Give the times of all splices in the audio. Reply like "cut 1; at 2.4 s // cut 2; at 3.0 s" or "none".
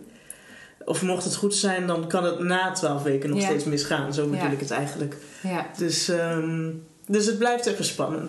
none

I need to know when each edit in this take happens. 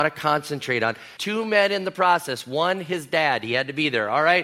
cut 1; at 1.2 s

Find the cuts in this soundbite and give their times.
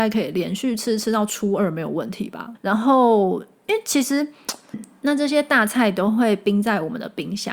cut 1; at 2.5 s // cut 2; at 4.7 s

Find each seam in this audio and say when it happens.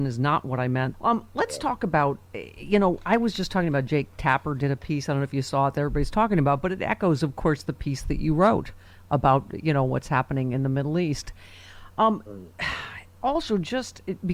cut 1; at 0.9 s

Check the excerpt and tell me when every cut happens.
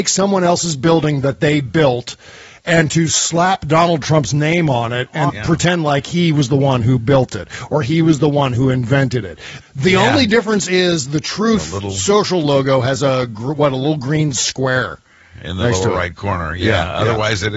cut 1; at 5.3 s // cut 2; at 9.6 s

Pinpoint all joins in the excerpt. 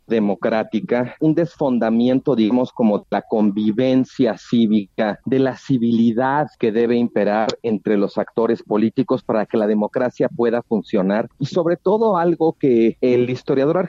none

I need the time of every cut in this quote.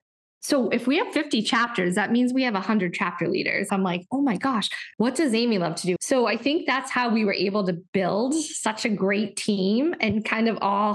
cut 1; at 3.7 s // cut 2; at 4.9 s // cut 3; at 6.0 s

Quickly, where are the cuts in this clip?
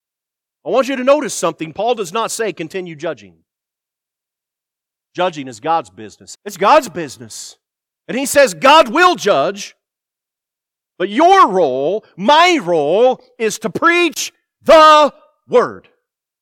cut 1; at 5.1 s // cut 2; at 6.3 s

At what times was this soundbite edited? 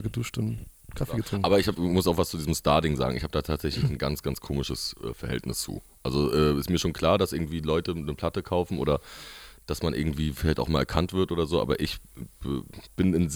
none

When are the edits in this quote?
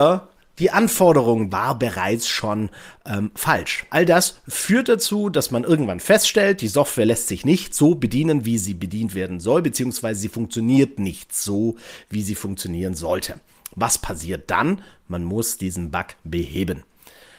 cut 1; at 1.5 s // cut 2; at 3.9 s

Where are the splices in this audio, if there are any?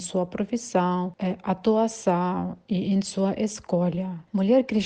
none

